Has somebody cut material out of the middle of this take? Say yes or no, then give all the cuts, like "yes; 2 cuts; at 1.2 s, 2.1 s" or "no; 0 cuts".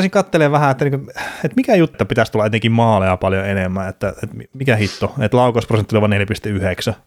yes; 1 cut; at 1.9 s